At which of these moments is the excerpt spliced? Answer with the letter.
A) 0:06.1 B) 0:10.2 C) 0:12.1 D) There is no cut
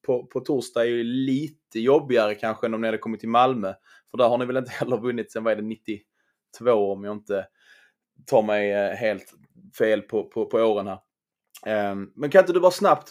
D